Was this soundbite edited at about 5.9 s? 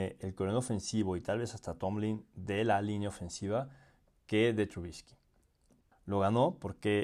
yes; 1 cut; at 5.9 s

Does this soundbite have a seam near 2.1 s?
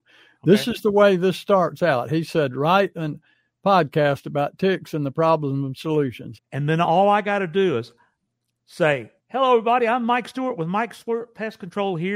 no; 2 cuts; at 6.4 s, 9.2 s

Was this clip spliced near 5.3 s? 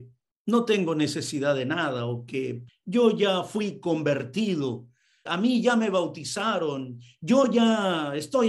yes; 2 cuts; at 2.7 s, 5.3 s

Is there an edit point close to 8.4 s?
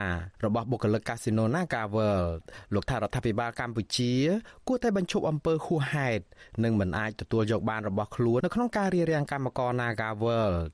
yes; 1 cut; at 8.4 s

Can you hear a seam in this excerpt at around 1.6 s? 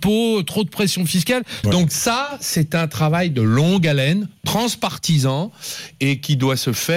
yes; 1 cut; at 1.6 s

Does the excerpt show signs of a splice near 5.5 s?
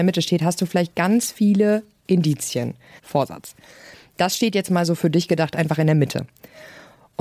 no; 1 cut; at 3.0 s

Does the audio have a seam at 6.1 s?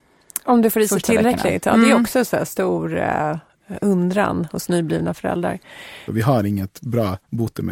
yes; 1 cut; at 6.1 s

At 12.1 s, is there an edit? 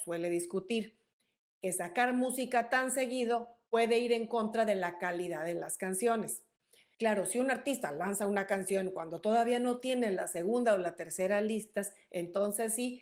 no; 1 cut; at 6.9 s

